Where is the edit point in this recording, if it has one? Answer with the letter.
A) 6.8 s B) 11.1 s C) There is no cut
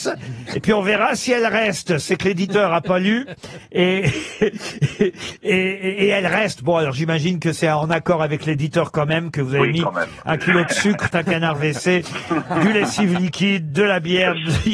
B